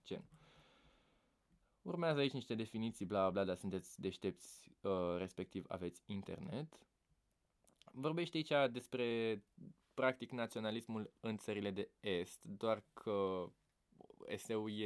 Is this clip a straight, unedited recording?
yes; 0 cuts

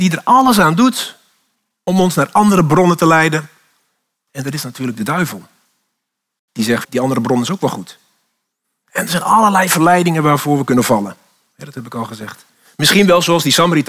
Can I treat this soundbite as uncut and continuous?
no; 1 cut; at 6.8 s

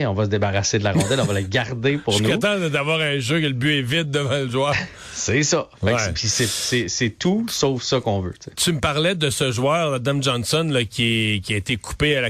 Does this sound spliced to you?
no; 0 cuts

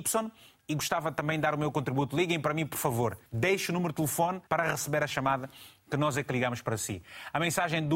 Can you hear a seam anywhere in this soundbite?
yes; 2 cuts; at 3.3 s, 4.5 s

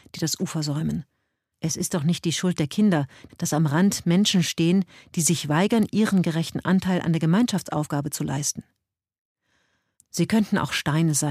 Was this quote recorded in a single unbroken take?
no; 3 cuts; at 1.5 s, 3.3 s, 9.9 s

